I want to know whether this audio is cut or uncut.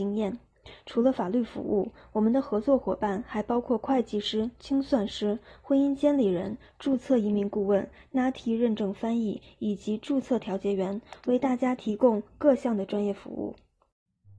uncut